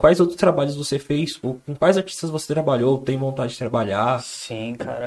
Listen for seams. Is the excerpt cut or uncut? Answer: uncut